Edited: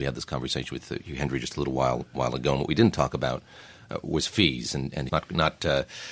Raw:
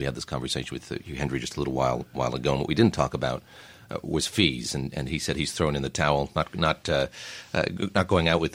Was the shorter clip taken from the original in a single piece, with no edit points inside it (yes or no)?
no